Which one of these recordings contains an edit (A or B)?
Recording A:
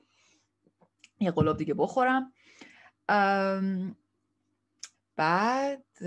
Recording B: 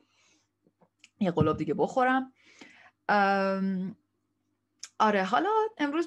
A